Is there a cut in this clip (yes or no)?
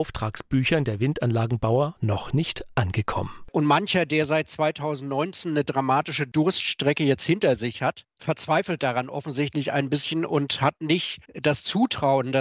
yes